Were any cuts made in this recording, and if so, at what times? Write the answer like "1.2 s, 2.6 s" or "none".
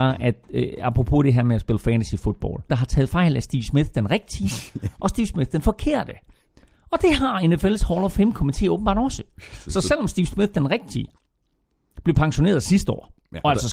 2.7 s